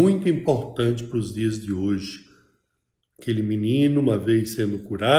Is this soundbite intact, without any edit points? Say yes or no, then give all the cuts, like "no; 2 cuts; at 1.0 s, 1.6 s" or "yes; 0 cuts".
yes; 0 cuts